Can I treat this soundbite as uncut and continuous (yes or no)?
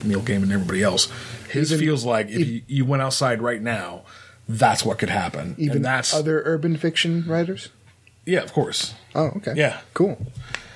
yes